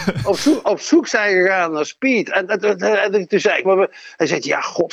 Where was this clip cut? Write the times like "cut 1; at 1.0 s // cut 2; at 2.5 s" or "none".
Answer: cut 1; at 3.6 s